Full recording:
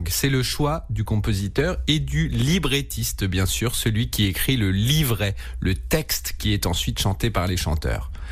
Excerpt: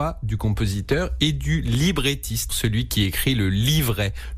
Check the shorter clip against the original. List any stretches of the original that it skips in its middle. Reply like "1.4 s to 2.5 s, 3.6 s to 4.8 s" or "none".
3.2 s to 3.7 s